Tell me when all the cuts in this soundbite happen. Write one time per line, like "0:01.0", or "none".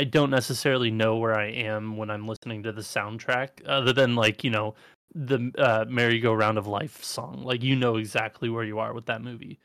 none